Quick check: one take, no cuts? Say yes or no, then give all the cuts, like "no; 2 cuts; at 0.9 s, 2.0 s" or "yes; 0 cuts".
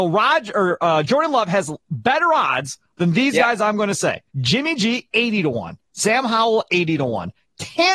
no; 1 cut; at 4.3 s